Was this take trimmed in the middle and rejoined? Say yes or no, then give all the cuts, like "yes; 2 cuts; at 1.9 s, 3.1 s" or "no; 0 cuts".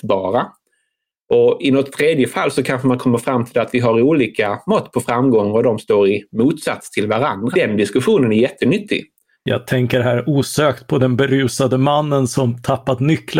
yes; 2 cuts; at 7.5 s, 9.3 s